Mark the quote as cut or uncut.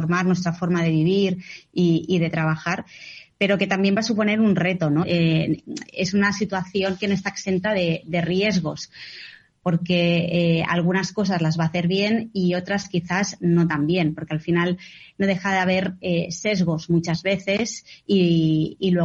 cut